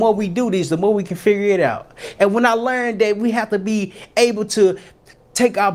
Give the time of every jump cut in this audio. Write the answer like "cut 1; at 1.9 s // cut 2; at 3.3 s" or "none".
cut 1; at 2.2 s